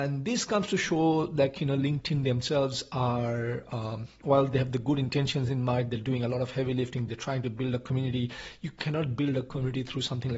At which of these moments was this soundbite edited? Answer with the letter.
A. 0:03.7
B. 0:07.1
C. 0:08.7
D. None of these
D